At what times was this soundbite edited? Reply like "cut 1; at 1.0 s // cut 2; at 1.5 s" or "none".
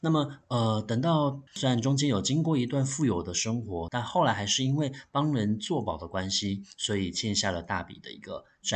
cut 1; at 1.5 s // cut 2; at 3.9 s

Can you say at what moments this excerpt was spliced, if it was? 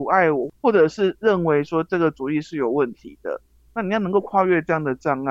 none

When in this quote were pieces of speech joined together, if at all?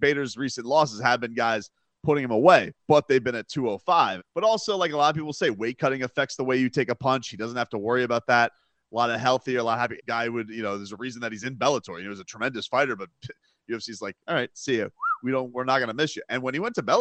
cut 1; at 4.2 s // cut 2; at 10.0 s

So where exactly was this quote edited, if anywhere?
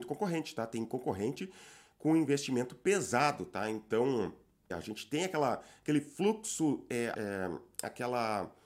cut 1; at 4.7 s // cut 2; at 7.1 s

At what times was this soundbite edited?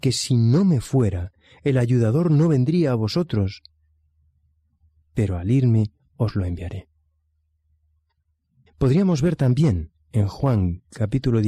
cut 1; at 8.7 s

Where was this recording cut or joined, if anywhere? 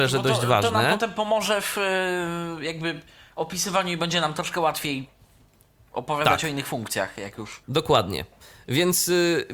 cut 1; at 7.6 s

